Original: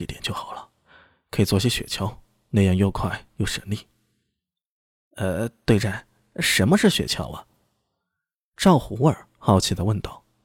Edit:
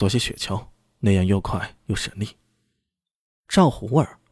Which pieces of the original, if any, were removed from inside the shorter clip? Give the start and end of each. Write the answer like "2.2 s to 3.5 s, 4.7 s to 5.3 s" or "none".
4.9 s to 8.5 s